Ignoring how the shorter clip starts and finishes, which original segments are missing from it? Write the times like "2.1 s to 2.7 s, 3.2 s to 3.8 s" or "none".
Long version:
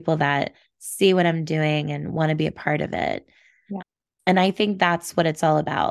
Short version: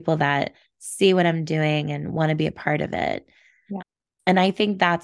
none